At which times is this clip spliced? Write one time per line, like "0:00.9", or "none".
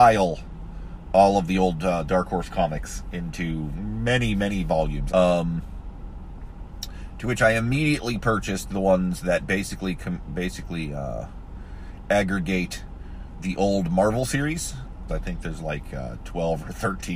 0:05.1
0:15.1